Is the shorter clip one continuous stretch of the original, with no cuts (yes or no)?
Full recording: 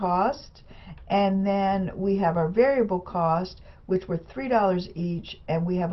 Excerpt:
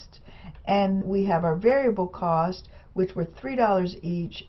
no